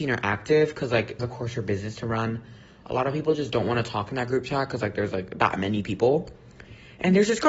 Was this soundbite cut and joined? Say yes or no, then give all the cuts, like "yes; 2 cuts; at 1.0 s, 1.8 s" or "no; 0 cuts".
yes; 1 cut; at 1.2 s